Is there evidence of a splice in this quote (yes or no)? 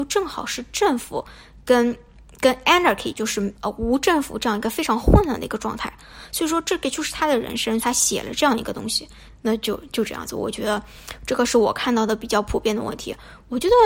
yes